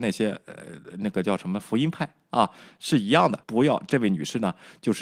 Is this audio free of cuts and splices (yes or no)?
no